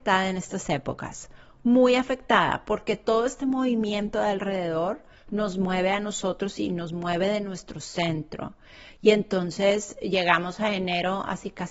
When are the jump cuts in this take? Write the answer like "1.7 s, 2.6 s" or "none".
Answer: none